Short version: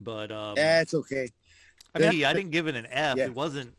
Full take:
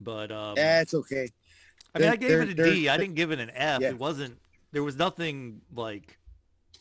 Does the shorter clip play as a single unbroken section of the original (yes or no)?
no